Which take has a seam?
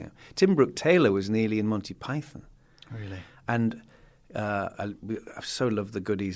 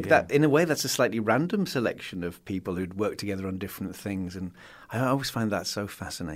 first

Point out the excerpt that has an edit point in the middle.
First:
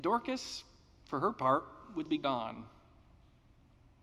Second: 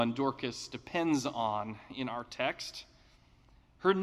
first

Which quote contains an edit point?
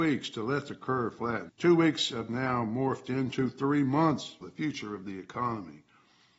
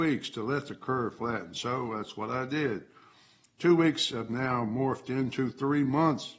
first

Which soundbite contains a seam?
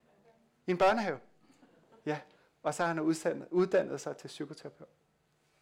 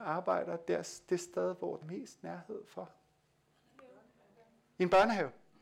second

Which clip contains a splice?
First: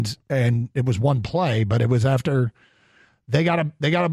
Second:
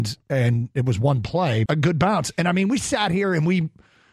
second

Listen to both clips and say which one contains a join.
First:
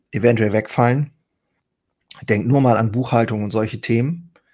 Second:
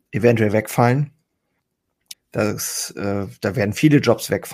second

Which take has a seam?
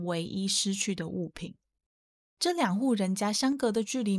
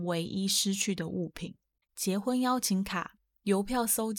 second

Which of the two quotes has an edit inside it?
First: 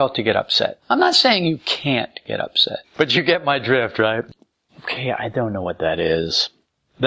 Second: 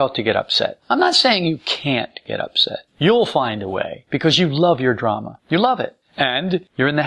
first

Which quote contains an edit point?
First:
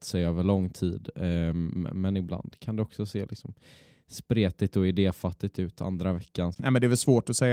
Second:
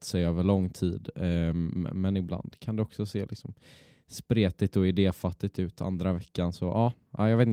first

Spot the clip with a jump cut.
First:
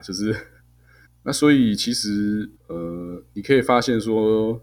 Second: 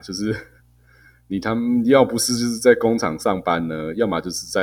first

